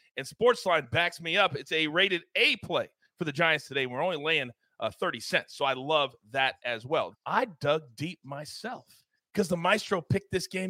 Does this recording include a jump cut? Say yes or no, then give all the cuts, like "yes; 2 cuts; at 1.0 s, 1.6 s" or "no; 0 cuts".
yes; 2 cuts; at 7.1 s, 9.2 s